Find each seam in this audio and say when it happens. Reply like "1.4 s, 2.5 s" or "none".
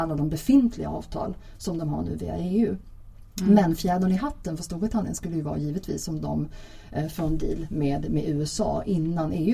none